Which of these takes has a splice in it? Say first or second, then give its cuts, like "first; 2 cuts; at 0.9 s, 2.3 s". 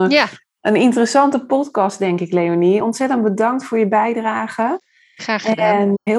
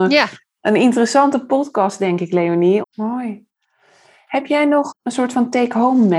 second; 1 cut; at 2.8 s